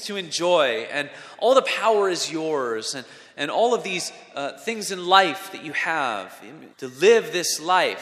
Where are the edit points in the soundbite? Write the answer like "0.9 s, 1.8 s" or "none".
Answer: 6.7 s